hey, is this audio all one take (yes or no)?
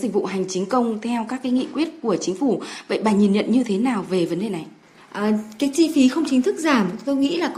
yes